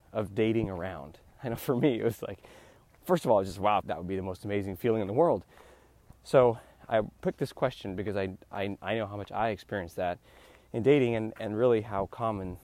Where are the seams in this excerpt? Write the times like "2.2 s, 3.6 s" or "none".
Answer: 3.8 s, 6.1 s